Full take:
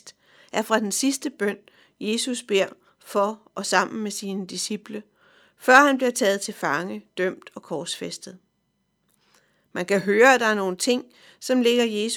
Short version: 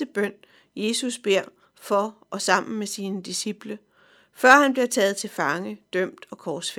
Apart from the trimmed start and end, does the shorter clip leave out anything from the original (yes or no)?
no